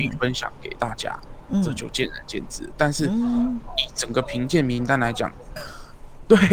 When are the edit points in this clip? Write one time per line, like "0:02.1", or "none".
0:05.6